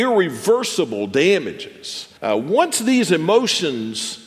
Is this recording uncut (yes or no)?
no